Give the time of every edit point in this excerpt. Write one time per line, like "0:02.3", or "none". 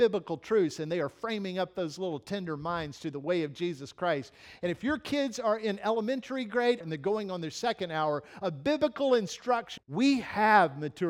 0:06.8
0:09.8